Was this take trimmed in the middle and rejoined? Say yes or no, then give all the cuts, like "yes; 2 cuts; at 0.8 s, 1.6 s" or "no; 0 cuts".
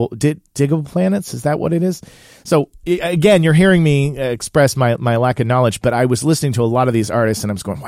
no; 0 cuts